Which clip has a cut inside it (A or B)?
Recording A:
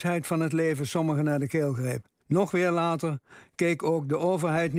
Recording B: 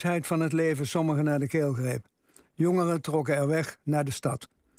A